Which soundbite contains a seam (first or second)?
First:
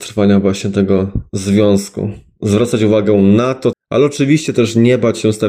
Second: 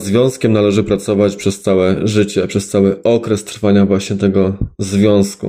first